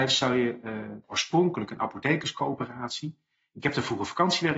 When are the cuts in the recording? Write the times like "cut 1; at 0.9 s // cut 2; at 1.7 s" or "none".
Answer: cut 1; at 1.0 s